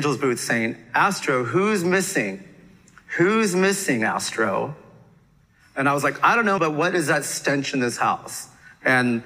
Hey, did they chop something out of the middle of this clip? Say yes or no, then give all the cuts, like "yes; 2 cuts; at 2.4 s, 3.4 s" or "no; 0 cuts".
yes; 1 cut; at 6.6 s